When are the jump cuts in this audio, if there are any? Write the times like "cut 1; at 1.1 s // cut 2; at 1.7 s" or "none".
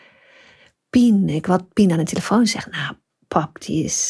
none